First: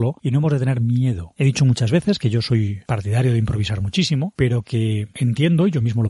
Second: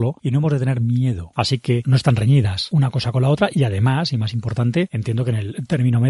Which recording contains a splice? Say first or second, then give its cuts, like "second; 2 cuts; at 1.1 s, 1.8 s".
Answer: second; 1 cut; at 1.3 s